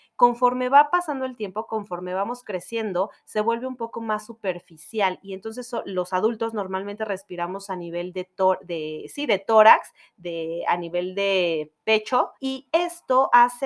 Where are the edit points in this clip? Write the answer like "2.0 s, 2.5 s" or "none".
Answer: 12.4 s